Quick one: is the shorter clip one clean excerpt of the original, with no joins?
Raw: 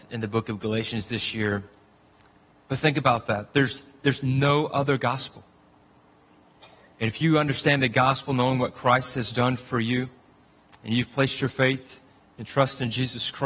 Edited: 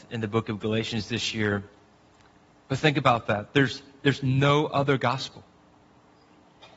yes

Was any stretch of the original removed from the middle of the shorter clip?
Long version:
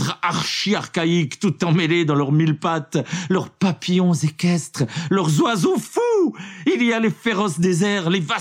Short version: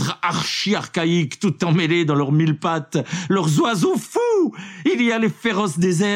yes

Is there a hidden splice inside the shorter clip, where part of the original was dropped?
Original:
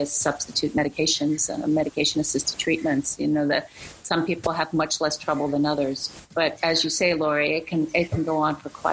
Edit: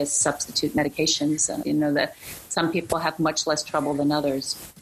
yes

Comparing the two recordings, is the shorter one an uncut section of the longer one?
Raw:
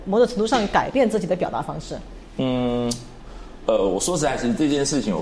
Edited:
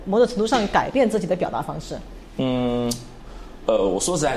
yes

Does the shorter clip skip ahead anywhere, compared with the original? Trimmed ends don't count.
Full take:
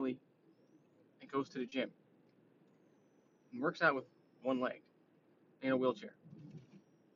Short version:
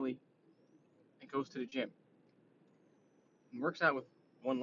no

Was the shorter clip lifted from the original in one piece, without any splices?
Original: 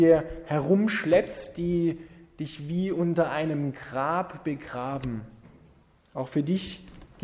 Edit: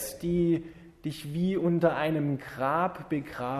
yes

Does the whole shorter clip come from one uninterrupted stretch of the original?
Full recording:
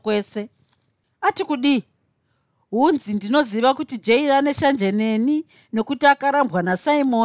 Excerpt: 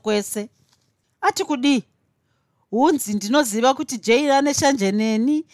yes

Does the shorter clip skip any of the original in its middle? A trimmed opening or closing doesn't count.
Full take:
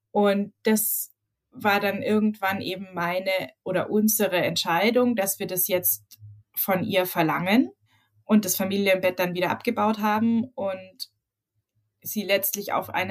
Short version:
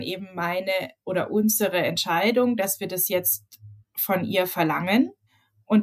no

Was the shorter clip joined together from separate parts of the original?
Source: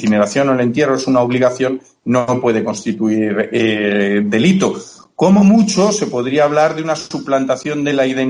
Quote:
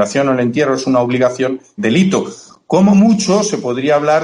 yes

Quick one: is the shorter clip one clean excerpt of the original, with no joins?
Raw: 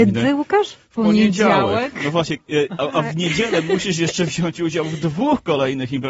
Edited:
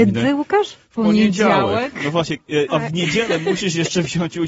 no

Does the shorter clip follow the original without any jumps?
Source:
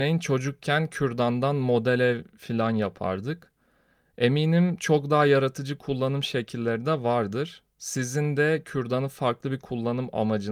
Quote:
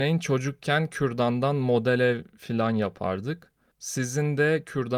no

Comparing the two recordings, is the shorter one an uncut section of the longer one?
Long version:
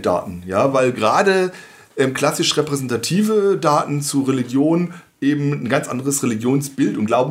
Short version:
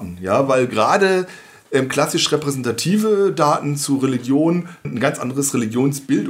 no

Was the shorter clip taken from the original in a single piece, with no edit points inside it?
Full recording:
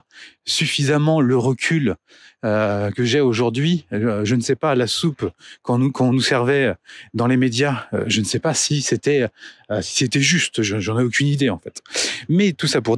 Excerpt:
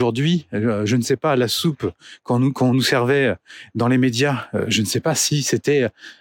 yes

